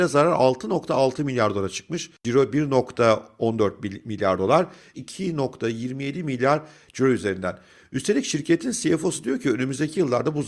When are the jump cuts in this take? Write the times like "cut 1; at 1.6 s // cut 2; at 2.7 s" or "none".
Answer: cut 1; at 4.9 s